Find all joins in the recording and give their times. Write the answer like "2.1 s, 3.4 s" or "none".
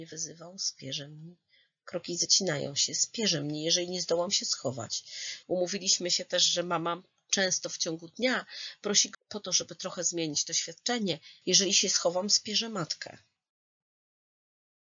5.4 s, 9.1 s, 11.4 s

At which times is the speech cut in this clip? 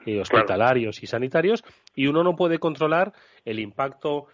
none

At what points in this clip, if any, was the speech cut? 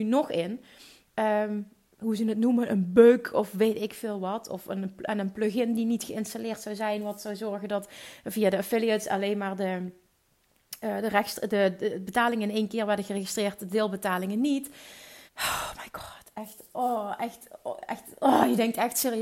15.3 s

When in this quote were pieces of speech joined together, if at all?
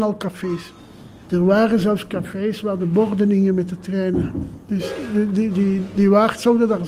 1.3 s

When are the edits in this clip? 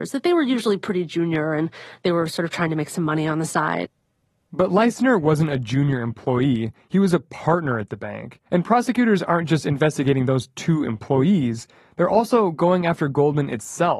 8.5 s

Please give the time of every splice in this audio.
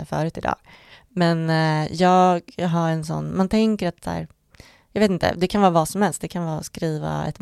none

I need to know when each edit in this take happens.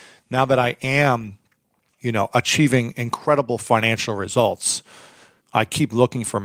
5.4 s

